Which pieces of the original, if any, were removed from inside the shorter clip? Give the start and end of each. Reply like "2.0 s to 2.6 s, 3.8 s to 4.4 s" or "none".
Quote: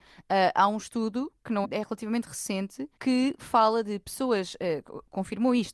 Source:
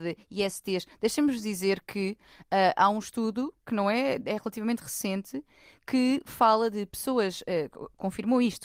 3.8 s to 4.2 s, 5.5 s to 5.8 s